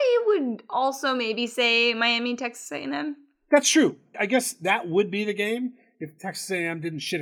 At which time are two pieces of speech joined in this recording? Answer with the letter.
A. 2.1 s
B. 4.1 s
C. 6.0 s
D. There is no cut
B